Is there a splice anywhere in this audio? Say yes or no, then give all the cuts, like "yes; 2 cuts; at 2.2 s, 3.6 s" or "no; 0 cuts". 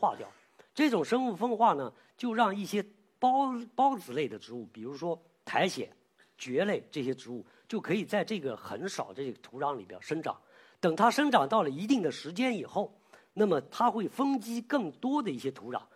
no; 0 cuts